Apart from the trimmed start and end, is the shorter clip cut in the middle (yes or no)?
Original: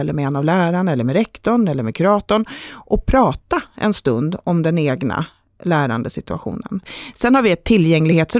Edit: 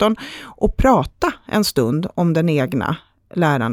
no